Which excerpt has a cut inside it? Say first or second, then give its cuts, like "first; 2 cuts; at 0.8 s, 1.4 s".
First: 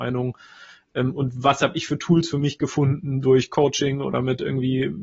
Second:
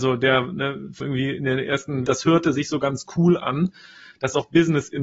second; 2 cuts; at 1.0 s, 2.1 s